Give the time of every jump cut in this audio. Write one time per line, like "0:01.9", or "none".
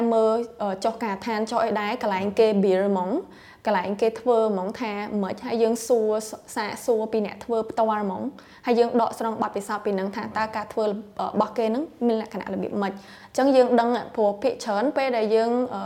none